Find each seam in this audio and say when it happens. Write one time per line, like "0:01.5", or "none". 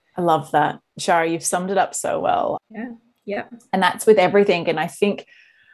0:02.6